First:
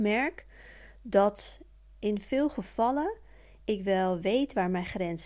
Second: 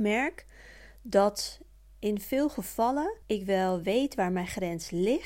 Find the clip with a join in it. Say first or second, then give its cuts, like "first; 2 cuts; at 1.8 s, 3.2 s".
second; 1 cut; at 3.2 s